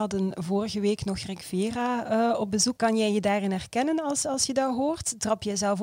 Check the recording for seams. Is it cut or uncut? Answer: cut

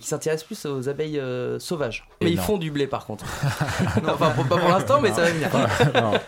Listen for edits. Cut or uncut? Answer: cut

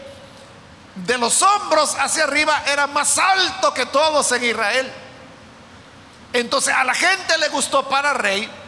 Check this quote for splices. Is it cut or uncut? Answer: cut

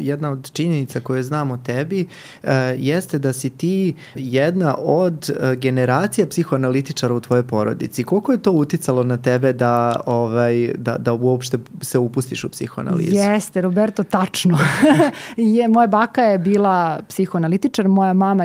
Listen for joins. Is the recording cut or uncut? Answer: cut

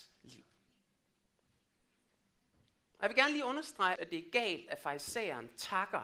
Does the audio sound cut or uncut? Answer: cut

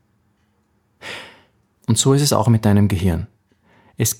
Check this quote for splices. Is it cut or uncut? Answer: cut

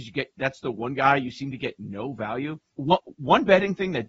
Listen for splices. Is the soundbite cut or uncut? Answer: cut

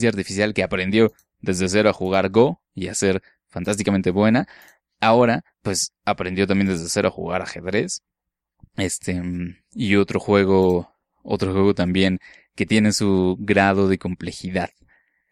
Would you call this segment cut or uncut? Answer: cut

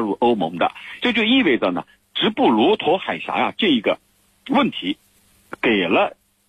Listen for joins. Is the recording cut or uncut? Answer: cut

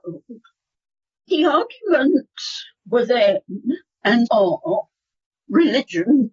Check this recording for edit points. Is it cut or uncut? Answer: cut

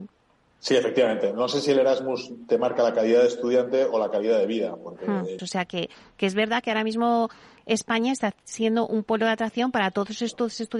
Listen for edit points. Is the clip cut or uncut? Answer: cut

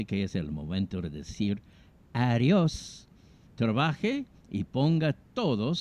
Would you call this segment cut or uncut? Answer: cut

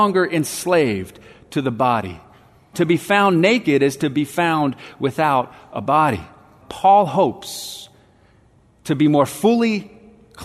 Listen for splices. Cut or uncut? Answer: cut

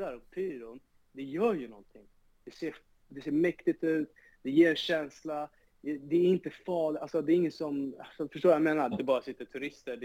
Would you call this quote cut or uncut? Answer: cut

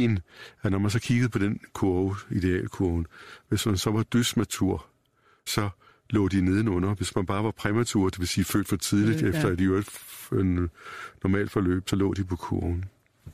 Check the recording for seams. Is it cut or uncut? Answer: cut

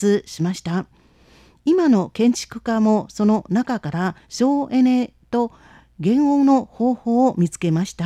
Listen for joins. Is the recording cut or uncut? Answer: cut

